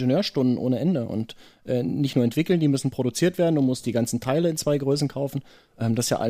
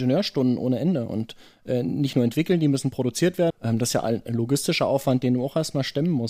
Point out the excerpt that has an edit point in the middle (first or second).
second